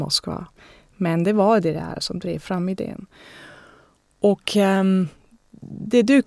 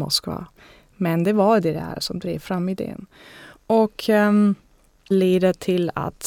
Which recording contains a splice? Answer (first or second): second